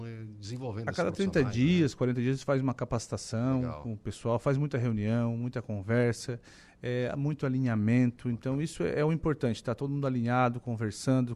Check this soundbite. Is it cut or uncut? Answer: uncut